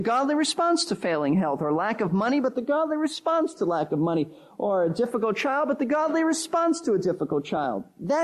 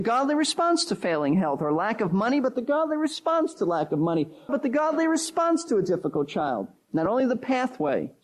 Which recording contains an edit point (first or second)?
second